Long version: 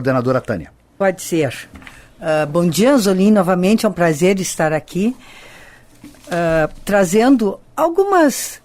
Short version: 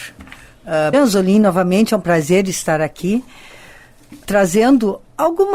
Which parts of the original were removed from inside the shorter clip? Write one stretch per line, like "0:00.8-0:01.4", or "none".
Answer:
0:02.5-0:02.8
0:06.2-0:06.8